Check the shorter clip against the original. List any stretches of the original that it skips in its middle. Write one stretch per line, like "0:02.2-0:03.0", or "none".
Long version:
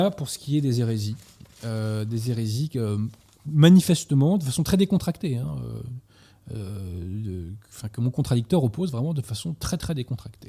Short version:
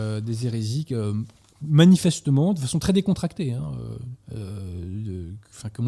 0:06.1-0:06.4